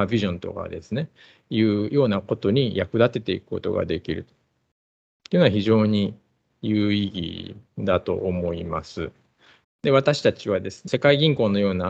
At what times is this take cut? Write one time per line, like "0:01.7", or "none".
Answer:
0:09.6
0:10.9